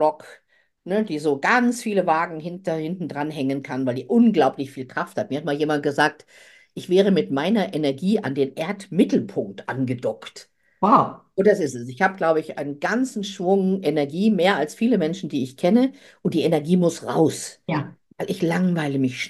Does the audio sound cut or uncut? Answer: uncut